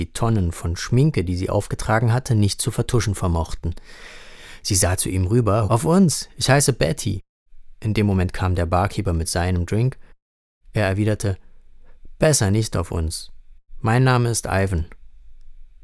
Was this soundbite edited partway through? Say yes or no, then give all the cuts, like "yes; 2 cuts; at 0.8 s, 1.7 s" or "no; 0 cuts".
yes; 1 cut; at 5.7 s